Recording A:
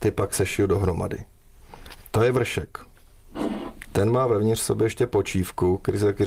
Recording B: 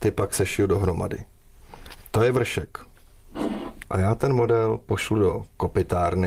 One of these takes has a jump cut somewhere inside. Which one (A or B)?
B